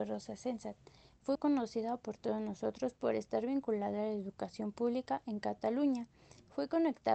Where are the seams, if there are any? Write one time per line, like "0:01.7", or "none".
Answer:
0:01.3